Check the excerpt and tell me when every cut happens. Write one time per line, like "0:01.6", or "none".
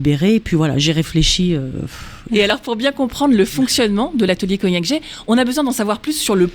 0:02.3